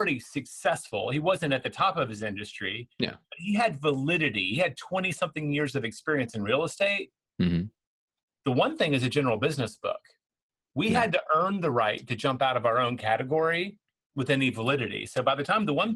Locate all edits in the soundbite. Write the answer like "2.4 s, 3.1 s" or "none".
none